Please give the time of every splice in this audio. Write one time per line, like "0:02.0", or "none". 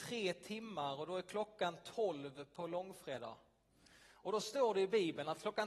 none